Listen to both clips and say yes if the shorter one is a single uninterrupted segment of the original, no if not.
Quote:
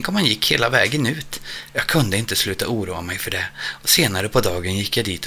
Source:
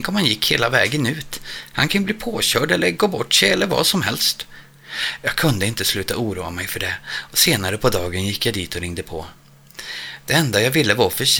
no